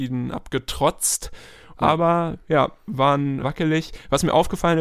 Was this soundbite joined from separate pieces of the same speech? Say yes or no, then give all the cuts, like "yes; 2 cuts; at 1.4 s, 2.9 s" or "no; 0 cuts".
yes; 2 cuts; at 1.7 s, 3.4 s